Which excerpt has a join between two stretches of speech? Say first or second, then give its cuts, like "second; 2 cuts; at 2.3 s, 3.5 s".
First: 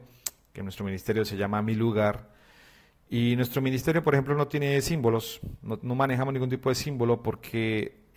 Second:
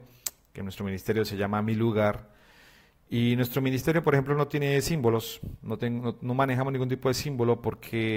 first; 1 cut; at 5.8 s